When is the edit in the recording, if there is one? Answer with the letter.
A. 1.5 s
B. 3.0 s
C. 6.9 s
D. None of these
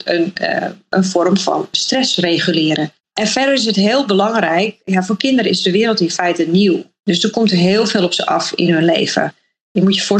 B